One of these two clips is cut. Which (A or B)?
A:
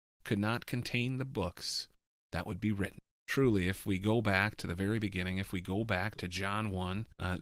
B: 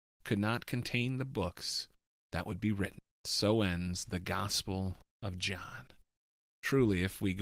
A